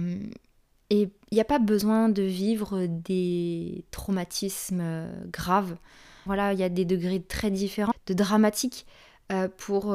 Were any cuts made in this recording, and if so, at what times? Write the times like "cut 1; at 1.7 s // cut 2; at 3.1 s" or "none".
cut 1; at 6.3 s // cut 2; at 7.9 s